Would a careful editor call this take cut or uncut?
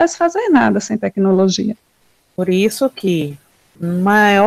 uncut